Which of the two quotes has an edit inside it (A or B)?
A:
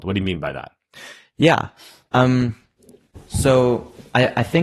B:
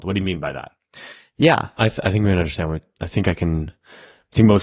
B